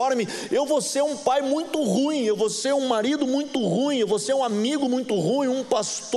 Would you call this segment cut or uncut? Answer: uncut